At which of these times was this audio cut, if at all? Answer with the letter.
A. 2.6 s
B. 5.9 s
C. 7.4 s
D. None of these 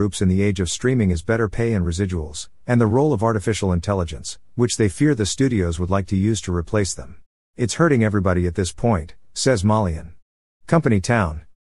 C